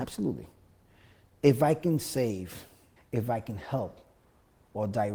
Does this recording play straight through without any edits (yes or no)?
no